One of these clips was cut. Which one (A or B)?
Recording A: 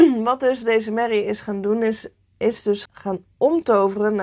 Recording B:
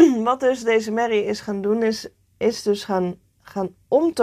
A